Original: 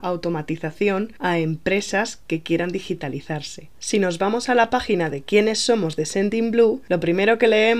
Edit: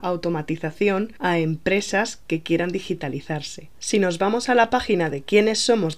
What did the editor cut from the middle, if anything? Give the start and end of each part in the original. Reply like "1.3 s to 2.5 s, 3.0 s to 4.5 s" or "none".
none

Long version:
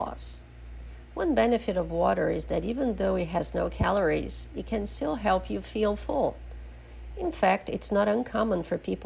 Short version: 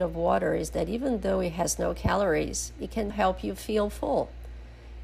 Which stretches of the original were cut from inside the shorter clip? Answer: 4.9 s to 5.2 s

